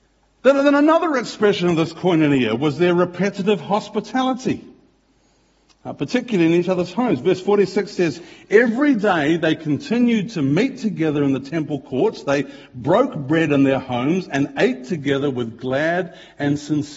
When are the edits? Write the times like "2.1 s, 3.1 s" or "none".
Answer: none